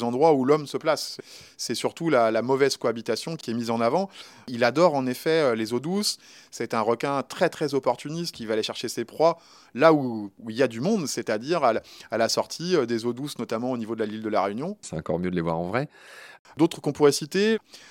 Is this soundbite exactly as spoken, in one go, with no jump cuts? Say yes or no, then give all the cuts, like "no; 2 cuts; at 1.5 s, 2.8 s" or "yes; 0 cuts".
no; 3 cuts; at 8.3 s, 14.8 s, 16.4 s